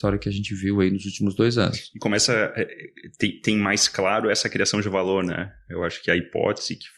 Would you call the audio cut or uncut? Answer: uncut